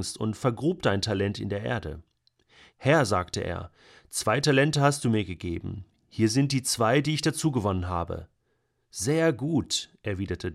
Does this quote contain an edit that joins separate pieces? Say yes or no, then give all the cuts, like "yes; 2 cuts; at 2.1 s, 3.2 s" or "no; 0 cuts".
yes; 1 cut; at 2.7 s